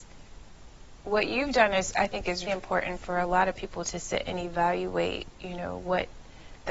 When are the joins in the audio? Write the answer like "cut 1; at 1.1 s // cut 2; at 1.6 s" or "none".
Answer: cut 1; at 2.5 s